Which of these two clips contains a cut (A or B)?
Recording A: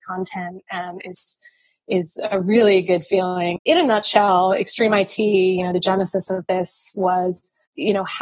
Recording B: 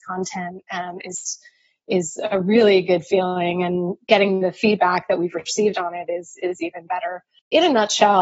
A